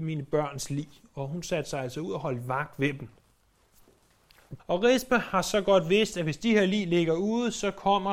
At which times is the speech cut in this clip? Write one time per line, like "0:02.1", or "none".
0:04.6